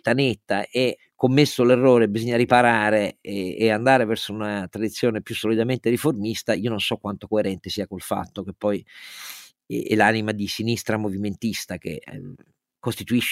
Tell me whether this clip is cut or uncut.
uncut